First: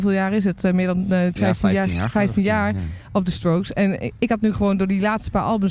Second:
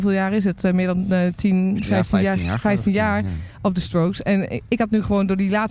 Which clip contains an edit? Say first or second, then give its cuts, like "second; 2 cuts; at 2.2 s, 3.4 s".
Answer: first; 1 cut; at 1.4 s